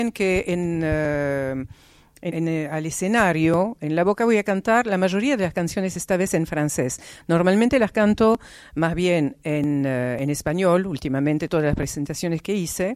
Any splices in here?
yes; 1 cut; at 2.3 s

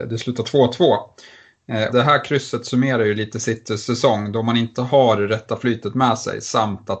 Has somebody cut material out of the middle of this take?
yes; 1 cut; at 1.9 s

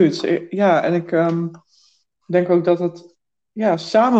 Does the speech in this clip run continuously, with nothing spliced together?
yes; 0 cuts

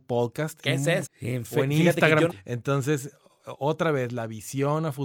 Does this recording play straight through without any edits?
no; 2 cuts; at 1.1 s, 2.3 s

